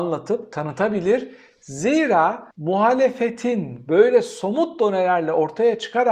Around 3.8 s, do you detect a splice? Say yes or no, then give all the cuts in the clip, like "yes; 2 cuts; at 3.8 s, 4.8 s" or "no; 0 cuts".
no; 1 cut; at 2.5 s